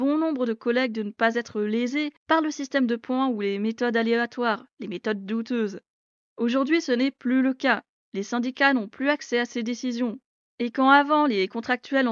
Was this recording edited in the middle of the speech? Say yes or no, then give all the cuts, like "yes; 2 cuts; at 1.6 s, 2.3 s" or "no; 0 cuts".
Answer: no; 0 cuts